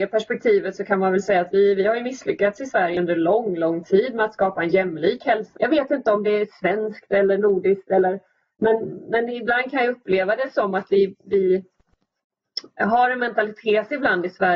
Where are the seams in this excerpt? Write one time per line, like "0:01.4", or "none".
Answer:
0:05.6